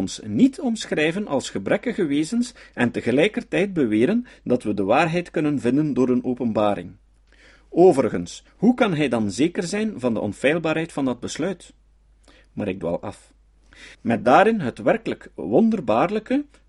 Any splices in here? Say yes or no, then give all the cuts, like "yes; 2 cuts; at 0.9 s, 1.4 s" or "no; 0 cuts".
yes; 2 cuts; at 8.5 s, 13.9 s